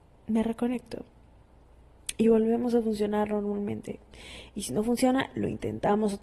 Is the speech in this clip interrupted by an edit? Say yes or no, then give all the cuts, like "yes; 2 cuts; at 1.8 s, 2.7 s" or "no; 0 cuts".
no; 0 cuts